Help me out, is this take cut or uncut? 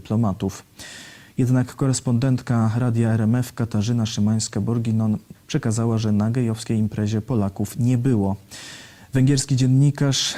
cut